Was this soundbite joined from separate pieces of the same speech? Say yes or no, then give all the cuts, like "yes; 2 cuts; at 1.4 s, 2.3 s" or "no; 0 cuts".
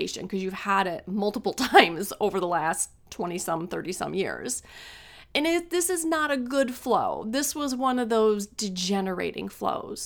no; 0 cuts